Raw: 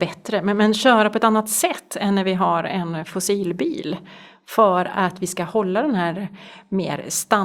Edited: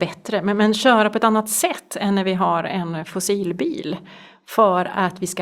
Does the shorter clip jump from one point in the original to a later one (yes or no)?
no